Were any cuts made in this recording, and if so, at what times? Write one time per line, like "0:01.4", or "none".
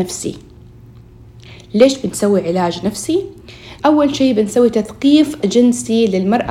0:03.8